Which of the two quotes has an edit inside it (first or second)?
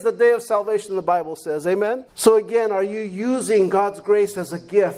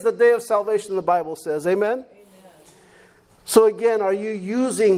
first